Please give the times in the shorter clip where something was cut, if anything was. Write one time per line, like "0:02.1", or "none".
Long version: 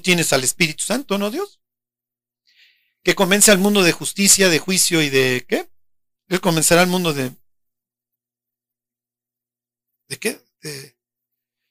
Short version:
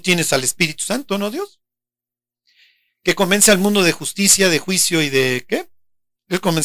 none